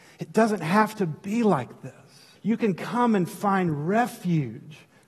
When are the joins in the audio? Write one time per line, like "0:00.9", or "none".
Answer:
0:02.4